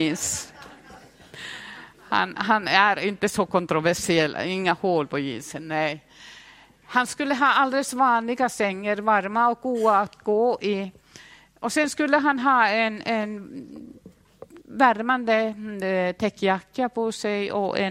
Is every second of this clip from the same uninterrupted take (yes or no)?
yes